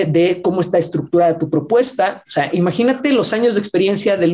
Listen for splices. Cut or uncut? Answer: cut